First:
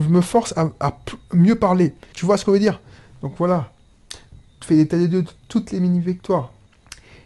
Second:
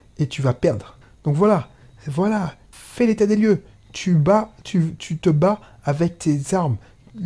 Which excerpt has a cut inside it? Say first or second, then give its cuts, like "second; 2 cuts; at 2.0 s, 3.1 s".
first; 1 cut; at 2.1 s